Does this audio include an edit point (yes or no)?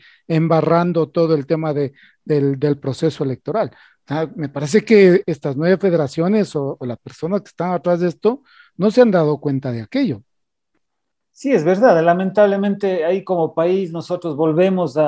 no